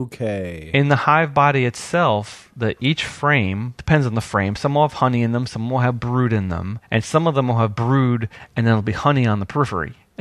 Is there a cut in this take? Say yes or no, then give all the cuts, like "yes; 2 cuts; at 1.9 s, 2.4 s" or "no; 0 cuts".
no; 0 cuts